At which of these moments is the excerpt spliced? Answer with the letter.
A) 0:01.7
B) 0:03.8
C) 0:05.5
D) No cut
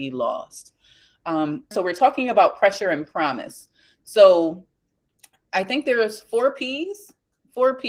A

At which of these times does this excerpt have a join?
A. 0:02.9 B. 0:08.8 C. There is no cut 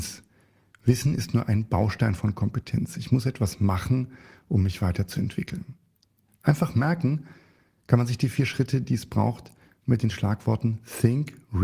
C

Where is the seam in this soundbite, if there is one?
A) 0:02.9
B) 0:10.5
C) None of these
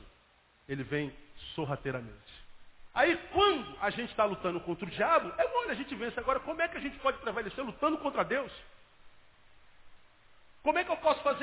A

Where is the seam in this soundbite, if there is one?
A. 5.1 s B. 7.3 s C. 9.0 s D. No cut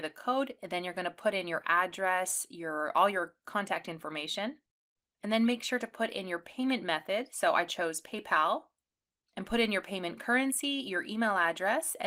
D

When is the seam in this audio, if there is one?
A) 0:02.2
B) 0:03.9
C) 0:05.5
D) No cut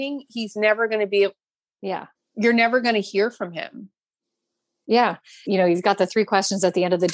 C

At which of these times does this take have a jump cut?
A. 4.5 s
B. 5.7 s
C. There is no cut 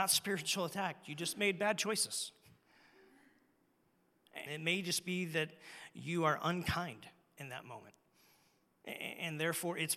A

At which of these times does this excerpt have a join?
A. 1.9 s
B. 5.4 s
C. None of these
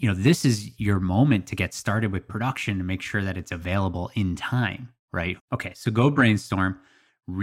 B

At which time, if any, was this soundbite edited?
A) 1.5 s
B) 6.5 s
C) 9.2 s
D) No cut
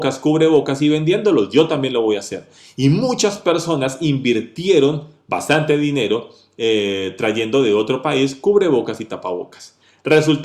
D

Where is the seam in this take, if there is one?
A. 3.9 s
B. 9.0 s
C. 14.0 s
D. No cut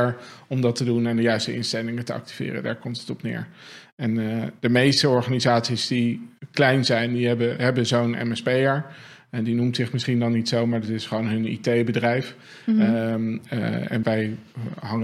C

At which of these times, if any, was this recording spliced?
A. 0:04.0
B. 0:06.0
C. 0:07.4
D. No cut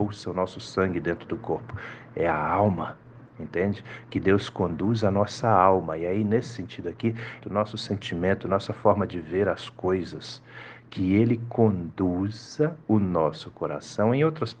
C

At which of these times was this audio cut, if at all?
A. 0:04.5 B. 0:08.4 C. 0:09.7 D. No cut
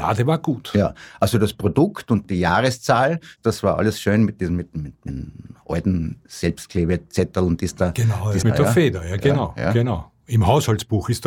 B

